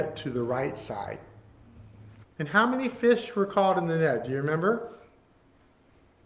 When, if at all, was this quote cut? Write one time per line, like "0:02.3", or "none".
0:02.2